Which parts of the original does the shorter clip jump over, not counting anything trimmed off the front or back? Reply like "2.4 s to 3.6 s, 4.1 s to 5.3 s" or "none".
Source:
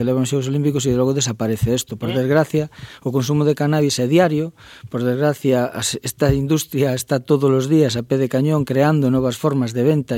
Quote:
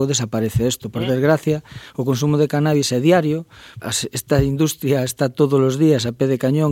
4.9 s to 5.7 s